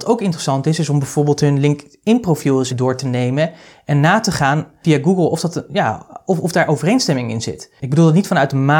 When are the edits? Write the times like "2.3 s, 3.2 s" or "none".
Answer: 2.7 s